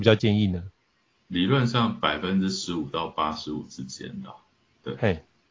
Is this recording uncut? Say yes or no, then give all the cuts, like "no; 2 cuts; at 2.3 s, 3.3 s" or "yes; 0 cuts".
yes; 0 cuts